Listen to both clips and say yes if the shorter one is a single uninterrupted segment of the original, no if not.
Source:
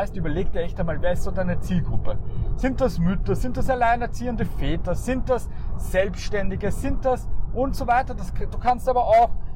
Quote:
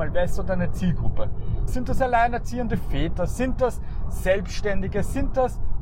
no